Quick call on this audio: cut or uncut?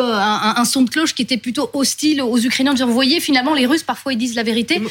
uncut